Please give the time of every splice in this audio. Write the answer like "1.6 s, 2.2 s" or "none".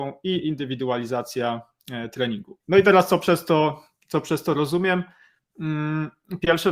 2.6 s